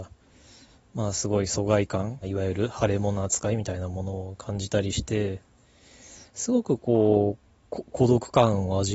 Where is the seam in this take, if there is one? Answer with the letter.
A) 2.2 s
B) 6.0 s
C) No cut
A